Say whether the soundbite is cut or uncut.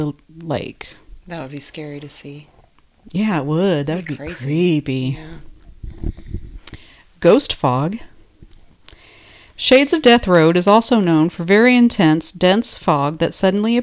uncut